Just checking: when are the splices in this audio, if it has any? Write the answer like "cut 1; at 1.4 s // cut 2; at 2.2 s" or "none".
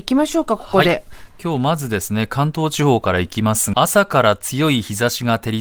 cut 1; at 3.7 s